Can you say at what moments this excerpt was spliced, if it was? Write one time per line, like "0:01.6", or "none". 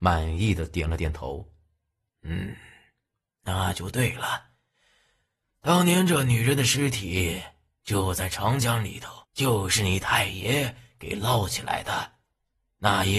0:09.2